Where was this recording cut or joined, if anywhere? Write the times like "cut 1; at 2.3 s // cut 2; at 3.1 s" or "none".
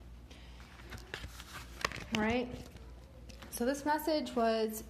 none